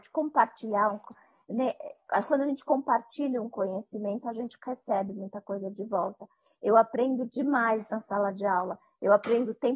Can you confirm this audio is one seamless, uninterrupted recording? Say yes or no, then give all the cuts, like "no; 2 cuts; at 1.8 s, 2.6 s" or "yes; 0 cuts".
yes; 0 cuts